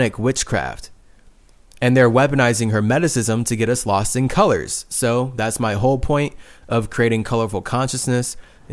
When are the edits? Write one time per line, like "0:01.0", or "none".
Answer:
none